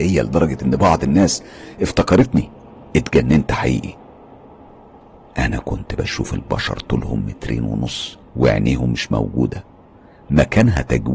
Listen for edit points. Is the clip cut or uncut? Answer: cut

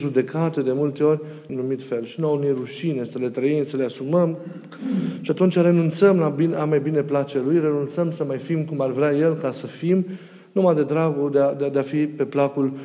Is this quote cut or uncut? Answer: cut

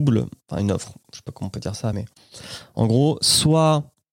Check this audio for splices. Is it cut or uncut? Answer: uncut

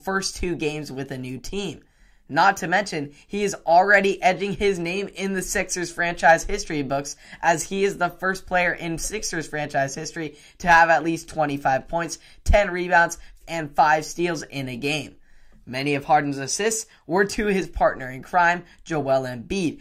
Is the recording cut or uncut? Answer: cut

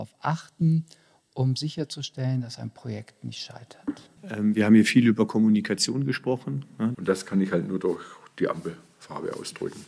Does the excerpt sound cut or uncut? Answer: cut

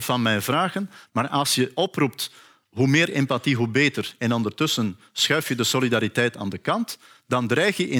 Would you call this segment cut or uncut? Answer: cut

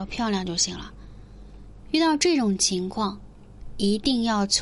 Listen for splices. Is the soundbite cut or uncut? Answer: cut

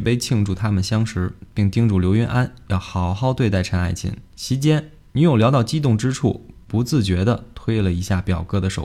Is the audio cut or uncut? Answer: cut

